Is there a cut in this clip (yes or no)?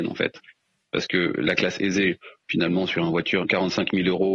yes